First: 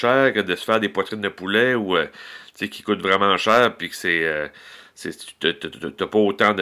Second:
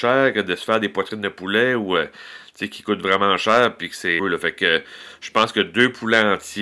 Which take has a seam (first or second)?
second